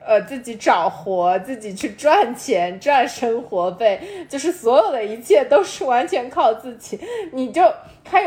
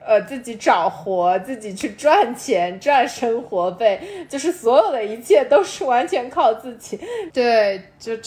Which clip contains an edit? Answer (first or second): second